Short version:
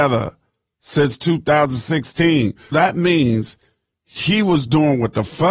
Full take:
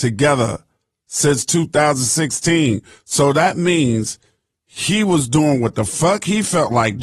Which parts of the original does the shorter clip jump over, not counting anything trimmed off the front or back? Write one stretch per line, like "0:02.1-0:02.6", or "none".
0:03.0-0:03.3